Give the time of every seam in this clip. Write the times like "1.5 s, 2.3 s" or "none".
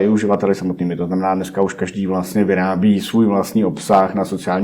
none